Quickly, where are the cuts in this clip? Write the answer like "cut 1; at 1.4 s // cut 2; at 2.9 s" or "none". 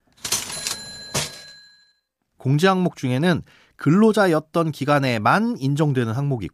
cut 1; at 2.4 s